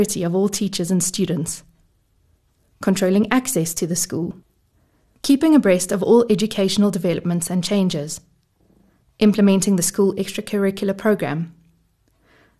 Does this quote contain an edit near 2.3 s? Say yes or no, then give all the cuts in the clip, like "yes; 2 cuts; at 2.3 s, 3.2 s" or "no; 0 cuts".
no; 0 cuts